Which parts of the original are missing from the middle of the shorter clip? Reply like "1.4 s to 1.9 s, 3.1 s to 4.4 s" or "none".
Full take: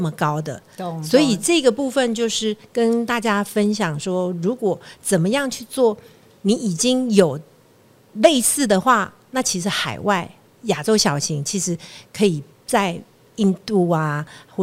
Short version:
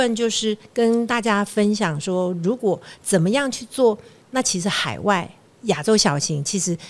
6.2 s to 9.2 s

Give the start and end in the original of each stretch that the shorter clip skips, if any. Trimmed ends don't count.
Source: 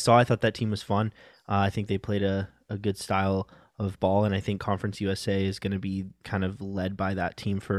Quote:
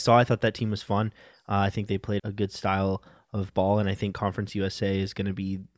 2.2 s to 2.6 s

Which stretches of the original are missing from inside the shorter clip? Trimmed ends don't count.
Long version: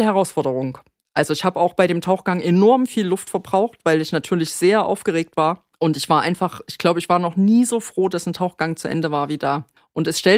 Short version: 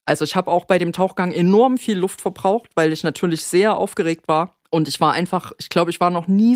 none

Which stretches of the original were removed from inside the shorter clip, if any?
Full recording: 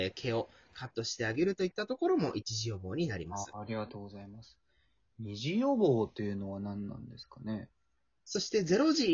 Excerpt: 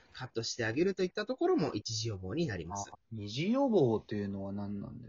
3.5 s to 5.0 s

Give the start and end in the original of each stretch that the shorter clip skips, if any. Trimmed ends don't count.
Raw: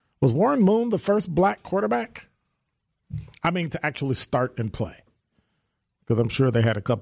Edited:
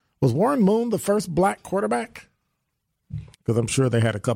3.3 s to 6.0 s

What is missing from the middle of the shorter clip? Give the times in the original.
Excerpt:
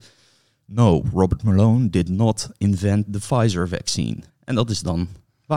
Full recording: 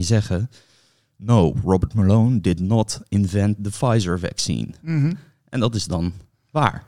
4.8 s to 5.3 s

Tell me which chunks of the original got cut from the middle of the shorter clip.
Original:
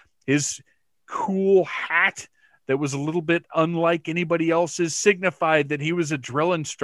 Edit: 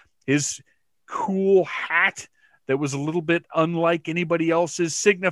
none

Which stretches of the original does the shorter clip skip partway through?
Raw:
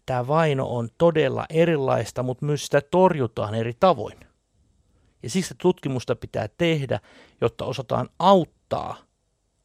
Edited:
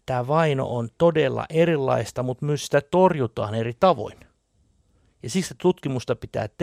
none

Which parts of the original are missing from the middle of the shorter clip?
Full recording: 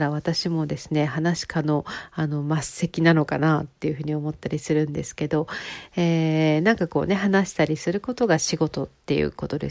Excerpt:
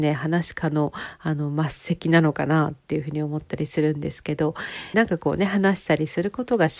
5.9 s to 6.6 s

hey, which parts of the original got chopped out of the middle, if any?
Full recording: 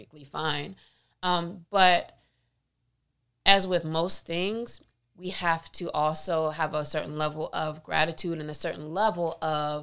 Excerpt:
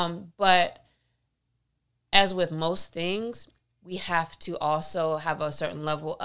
none

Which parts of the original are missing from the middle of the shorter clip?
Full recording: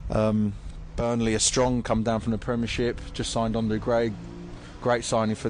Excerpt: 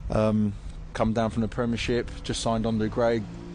0.9 s to 1.8 s

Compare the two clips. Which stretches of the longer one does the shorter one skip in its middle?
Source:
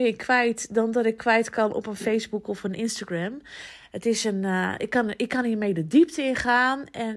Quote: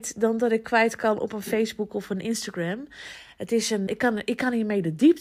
4.4 s to 4.8 s

